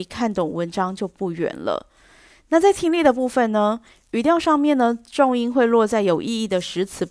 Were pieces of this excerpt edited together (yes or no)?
no